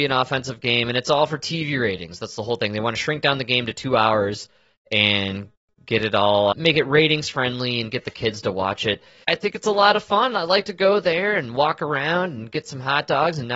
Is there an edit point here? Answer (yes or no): yes